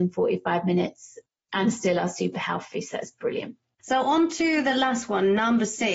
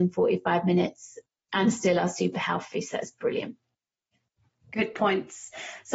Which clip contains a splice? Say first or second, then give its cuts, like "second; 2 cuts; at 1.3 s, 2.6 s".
first; 1 cut; at 3.8 s